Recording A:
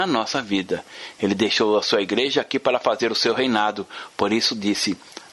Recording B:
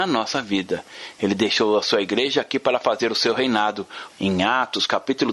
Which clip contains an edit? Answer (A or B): B